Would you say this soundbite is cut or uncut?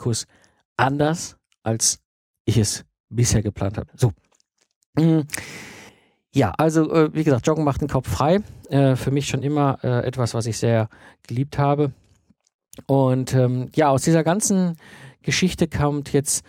cut